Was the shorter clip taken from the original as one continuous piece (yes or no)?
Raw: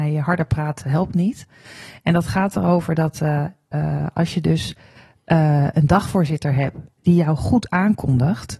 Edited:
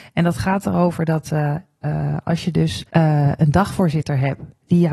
no